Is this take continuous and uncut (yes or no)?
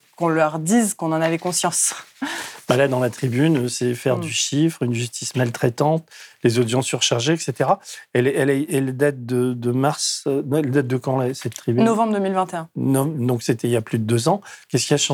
yes